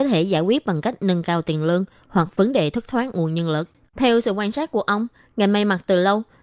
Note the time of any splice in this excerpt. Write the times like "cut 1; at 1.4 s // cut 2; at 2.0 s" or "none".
cut 1; at 3.9 s